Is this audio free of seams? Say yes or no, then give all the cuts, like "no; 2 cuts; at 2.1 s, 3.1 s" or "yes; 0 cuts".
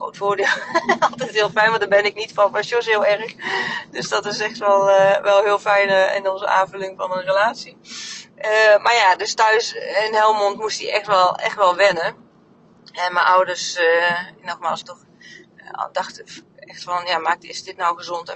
no; 1 cut; at 14.8 s